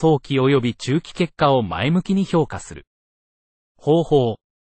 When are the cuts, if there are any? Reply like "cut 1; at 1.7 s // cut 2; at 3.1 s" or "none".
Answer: none

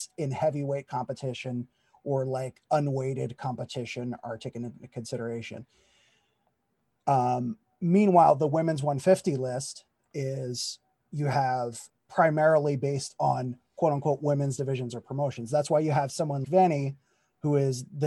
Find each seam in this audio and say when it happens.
cut 1; at 11.9 s // cut 2; at 16.4 s

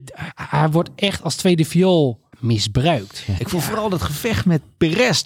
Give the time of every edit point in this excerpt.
cut 1; at 2.3 s // cut 2; at 3.4 s

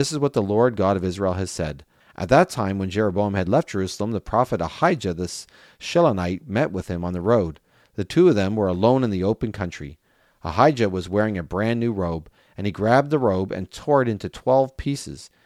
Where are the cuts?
cut 1; at 2.0 s

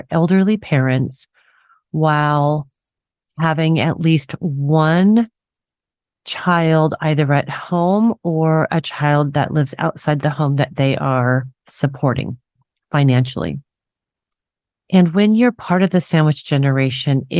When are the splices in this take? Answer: none

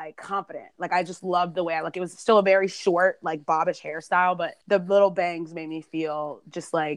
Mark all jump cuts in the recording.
cut 1; at 4.6 s

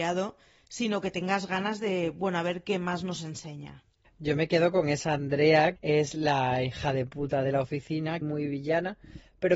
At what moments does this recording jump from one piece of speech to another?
cut 1; at 4.0 s // cut 2; at 5.8 s // cut 3; at 8.2 s

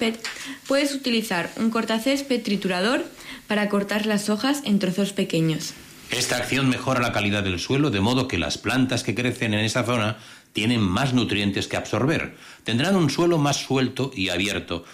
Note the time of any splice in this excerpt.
none

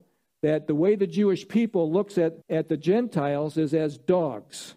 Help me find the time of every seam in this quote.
cut 1; at 2.4 s

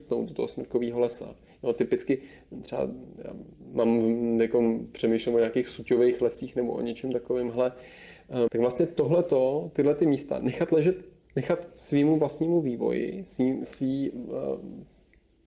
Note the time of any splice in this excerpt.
cut 1; at 8.5 s // cut 2; at 13.6 s

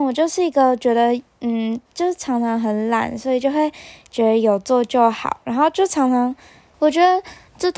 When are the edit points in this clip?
cut 1; at 6.7 s

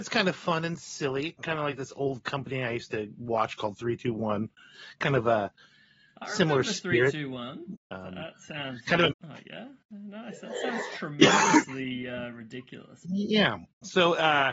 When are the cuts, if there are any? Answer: cut 1; at 7.7 s // cut 2; at 9.1 s // cut 3; at 13.0 s

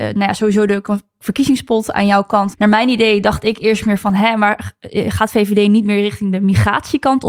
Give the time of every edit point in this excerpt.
cut 1; at 2.5 s

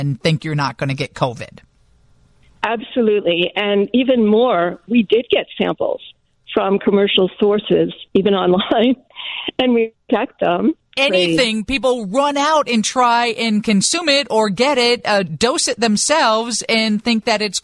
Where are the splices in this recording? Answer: cut 1; at 11.0 s

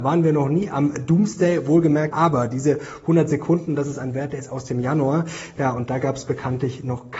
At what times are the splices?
cut 1; at 2.1 s

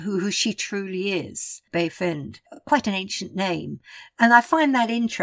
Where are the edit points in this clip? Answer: none

